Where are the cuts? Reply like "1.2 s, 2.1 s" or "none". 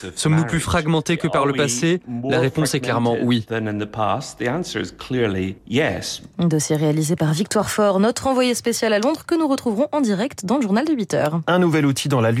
5.6 s